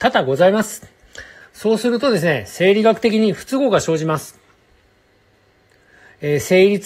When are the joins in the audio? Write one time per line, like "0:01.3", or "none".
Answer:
0:01.4